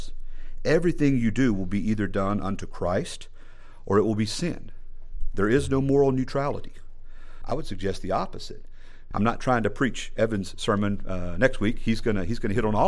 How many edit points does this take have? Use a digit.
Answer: 2